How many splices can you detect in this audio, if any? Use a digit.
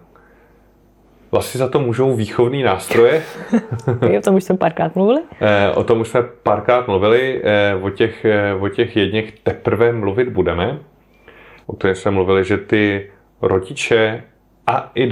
1